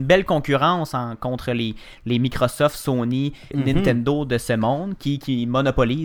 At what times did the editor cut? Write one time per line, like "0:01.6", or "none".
0:03.5